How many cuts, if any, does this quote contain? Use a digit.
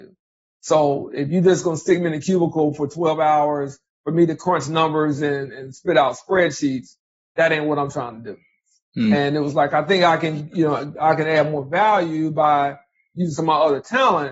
1